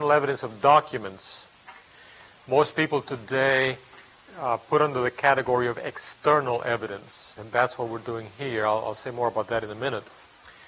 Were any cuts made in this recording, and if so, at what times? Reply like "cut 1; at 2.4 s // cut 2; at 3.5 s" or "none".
cut 1; at 7.4 s